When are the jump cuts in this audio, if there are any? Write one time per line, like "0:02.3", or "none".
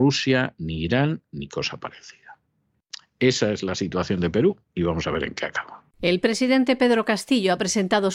0:05.9